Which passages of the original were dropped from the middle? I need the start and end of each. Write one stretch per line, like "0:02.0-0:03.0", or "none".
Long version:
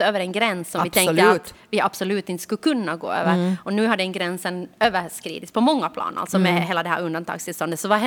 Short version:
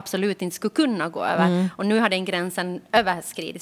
none

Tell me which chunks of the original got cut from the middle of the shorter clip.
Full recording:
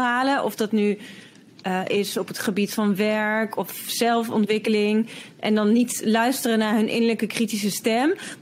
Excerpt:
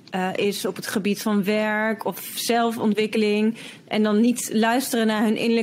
none

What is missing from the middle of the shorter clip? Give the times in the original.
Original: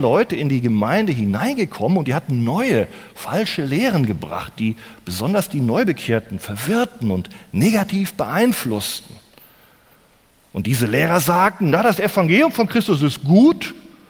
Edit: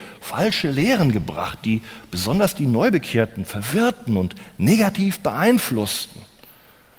none

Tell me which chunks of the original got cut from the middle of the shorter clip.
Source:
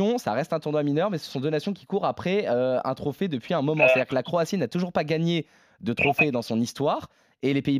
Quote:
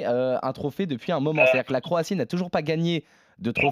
none

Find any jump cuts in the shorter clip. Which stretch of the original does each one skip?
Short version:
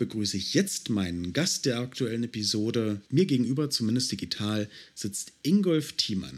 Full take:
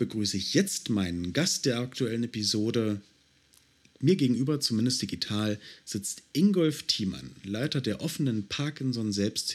0:03.1-0:04.0

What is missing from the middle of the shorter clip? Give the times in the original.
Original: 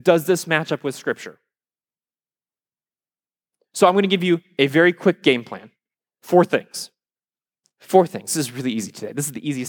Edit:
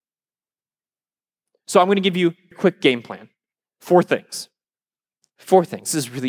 0:04.6-0:04.9

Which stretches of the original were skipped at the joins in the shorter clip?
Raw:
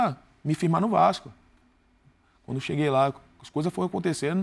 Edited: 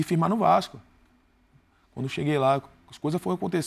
none

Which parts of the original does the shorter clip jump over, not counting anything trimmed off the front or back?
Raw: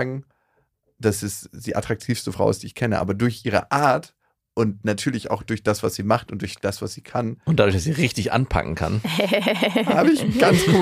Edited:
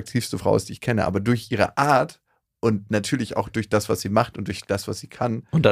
none

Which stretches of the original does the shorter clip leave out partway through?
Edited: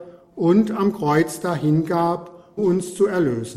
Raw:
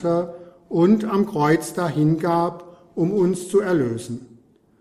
0:02.9-0:03.1

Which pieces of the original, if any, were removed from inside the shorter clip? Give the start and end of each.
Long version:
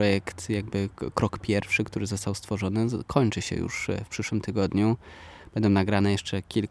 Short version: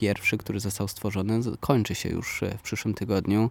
none

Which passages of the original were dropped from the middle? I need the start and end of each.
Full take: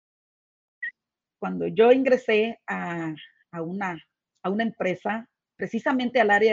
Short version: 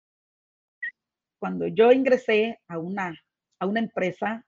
0:02.6-0:03.5

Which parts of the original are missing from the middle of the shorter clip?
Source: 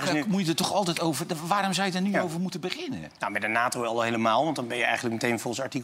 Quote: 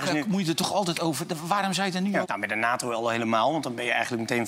0:02.2-0:03.1

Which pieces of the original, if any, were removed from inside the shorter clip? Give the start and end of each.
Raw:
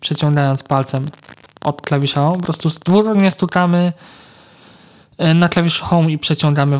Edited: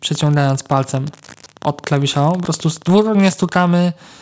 none

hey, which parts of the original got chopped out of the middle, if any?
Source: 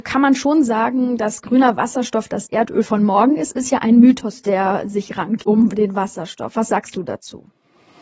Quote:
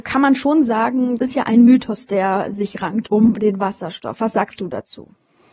0:01.2-0:03.5

